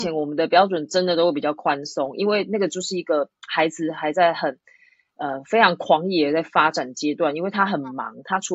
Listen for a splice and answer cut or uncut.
uncut